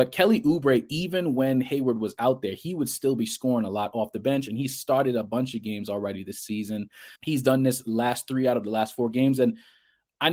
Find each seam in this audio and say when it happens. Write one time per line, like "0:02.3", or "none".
0:07.2